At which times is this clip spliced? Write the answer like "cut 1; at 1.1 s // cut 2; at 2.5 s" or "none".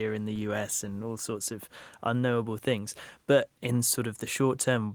none